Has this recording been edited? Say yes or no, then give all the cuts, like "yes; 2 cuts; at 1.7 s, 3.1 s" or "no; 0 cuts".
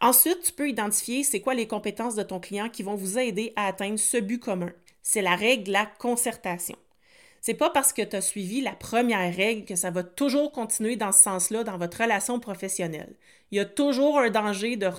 yes; 1 cut; at 4.9 s